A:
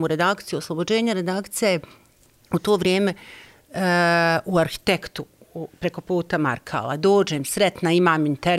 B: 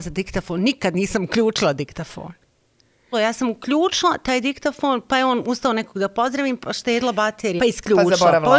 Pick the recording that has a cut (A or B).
B